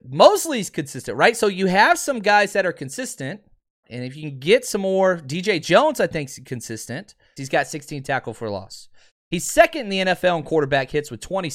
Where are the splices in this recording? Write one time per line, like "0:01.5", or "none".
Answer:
0:03.8
0:07.4